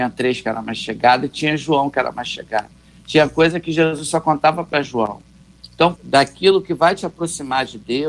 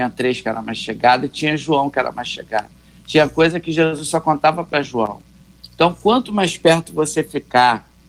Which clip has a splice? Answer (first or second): first